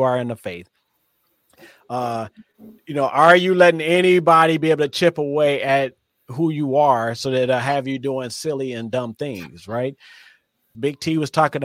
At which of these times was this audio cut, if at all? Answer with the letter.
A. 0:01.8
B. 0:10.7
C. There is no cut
B